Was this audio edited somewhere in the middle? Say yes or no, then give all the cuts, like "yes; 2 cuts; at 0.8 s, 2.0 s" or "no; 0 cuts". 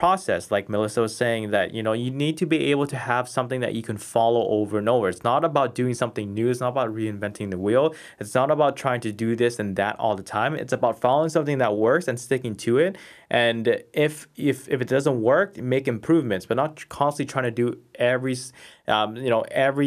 no; 0 cuts